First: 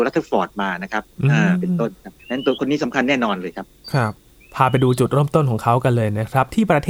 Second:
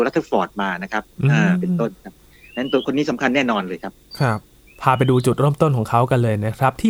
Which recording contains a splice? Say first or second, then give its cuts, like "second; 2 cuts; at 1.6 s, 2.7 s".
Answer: first; 1 cut; at 2.2 s